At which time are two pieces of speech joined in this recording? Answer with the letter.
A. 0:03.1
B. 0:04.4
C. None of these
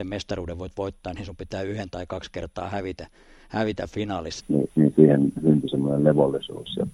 B